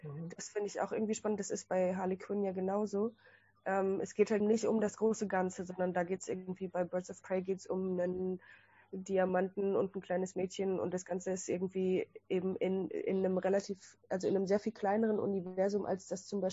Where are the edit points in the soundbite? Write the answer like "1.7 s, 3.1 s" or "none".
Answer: 4.4 s